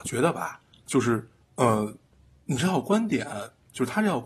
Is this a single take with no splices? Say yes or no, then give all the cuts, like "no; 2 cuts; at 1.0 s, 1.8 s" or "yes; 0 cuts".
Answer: yes; 0 cuts